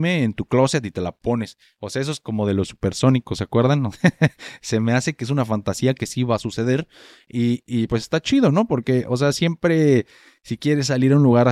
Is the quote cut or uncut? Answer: uncut